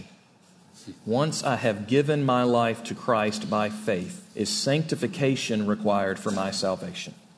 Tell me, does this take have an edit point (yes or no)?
yes